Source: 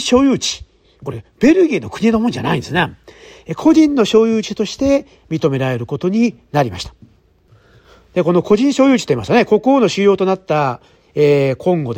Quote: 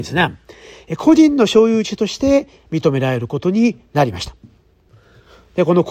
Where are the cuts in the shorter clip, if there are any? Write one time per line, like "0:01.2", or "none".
none